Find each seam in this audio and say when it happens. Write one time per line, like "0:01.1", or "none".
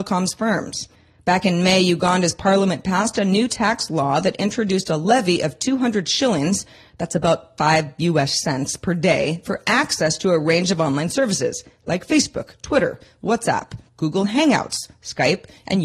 none